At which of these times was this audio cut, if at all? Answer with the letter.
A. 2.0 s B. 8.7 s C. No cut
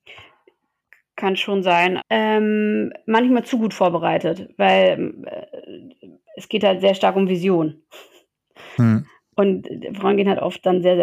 A